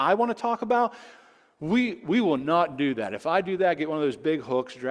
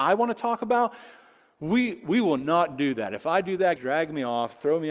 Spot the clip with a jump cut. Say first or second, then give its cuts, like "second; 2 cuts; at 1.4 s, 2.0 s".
second; 1 cut; at 3.8 s